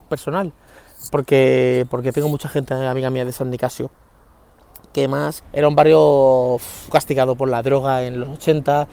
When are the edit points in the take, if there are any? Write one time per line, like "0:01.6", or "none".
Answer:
0:05.4
0:06.9